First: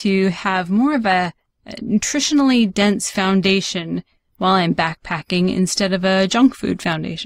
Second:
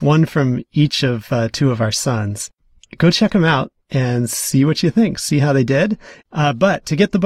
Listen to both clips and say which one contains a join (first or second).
second